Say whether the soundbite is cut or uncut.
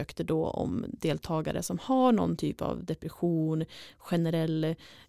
uncut